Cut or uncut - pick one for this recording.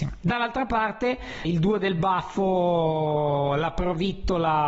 cut